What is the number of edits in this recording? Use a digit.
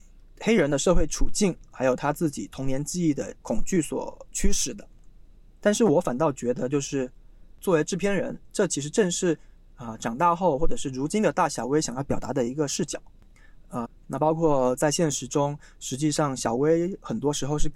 2